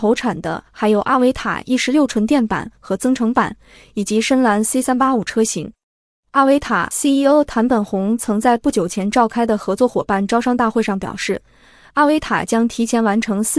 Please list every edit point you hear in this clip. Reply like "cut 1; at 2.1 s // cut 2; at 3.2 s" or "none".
none

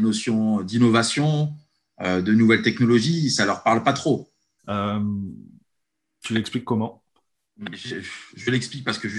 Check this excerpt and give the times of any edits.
cut 1; at 4.6 s

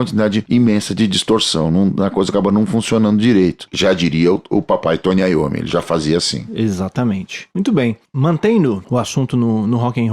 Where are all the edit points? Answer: cut 1; at 7.5 s

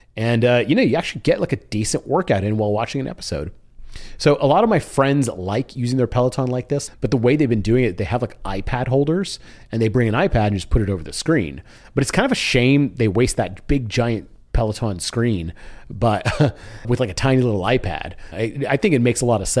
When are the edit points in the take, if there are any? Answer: cut 1; at 6.9 s // cut 2; at 16.8 s // cut 3; at 18.3 s

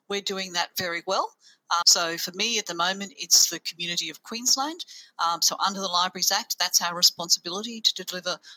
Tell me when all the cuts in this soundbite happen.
cut 1; at 1.8 s

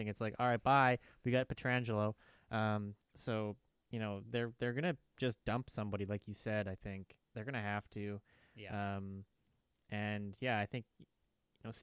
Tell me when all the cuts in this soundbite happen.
none

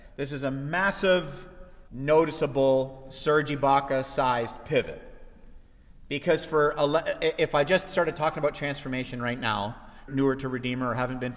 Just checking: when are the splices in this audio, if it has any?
cut 1; at 1.9 s // cut 2; at 10.1 s

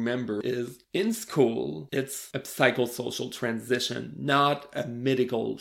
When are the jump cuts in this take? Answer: none

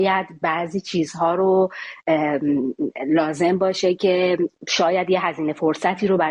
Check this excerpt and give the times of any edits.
cut 1; at 4.6 s

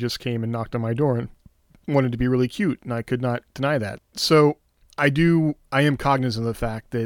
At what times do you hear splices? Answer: cut 1; at 4.0 s

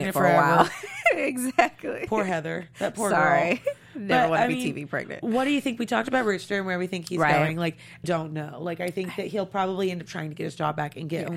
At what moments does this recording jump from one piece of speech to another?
cut 1; at 8.0 s

